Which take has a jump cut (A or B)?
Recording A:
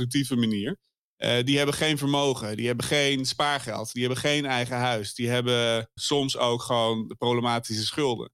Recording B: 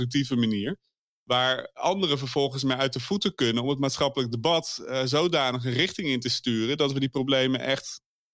A